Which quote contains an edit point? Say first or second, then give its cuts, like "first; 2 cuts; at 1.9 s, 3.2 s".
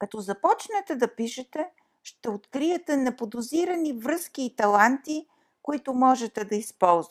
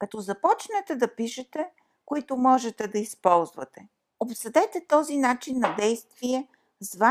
second; 2 cuts; at 1.9 s, 4.1 s